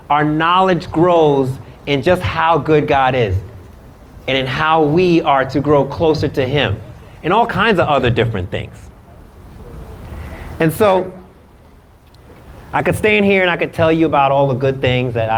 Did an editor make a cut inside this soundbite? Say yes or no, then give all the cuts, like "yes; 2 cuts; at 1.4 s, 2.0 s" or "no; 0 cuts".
no; 0 cuts